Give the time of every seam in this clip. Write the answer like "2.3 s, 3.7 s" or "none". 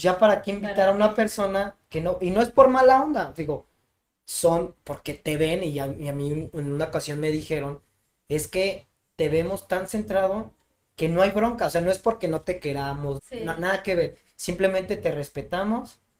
13.2 s